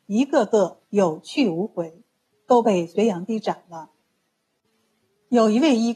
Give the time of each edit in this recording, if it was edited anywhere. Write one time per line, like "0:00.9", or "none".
none